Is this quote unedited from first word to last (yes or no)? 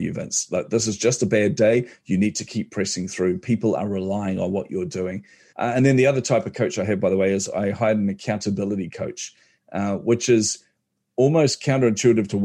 no